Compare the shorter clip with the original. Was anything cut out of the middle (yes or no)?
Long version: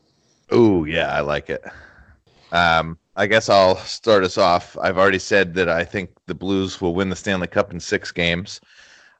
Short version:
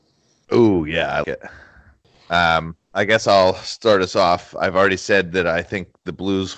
yes